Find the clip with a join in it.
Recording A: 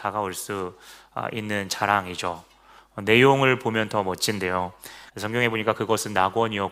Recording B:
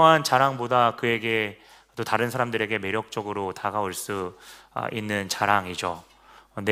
A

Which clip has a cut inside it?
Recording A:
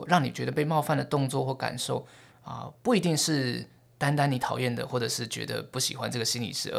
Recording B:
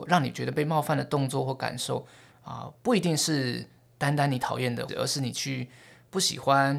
B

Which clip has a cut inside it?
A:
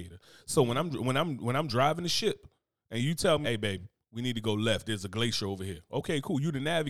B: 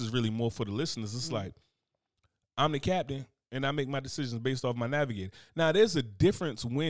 A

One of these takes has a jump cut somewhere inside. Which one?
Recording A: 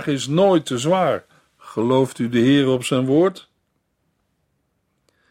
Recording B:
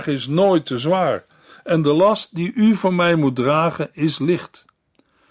A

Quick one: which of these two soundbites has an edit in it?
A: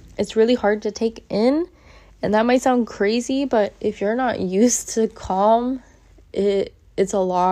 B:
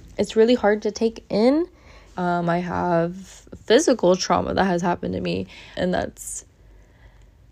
B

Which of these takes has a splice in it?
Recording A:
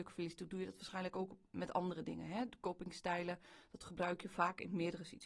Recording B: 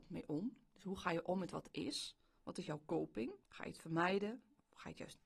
B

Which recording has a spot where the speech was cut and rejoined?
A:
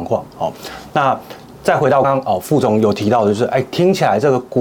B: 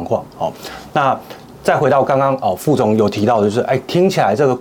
A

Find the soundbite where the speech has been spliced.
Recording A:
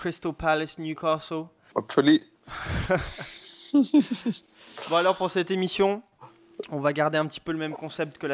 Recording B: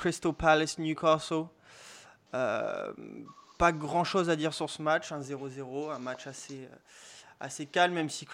A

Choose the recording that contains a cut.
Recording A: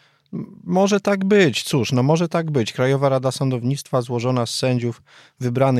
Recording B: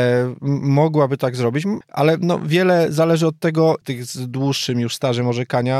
B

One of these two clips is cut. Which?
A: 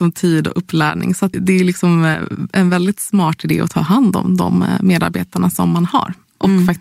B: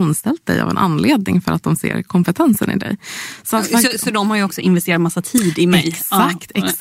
A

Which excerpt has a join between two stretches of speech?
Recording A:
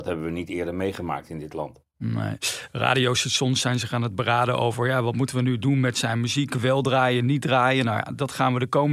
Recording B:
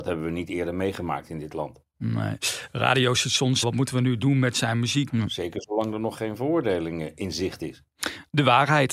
B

